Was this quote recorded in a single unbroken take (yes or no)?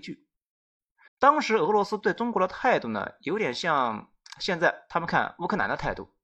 no